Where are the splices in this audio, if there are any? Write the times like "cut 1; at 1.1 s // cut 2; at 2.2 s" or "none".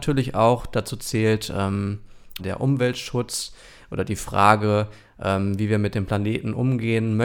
cut 1; at 2.4 s